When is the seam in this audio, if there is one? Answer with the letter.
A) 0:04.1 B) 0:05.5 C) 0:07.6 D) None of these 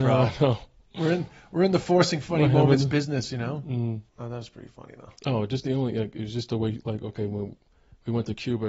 A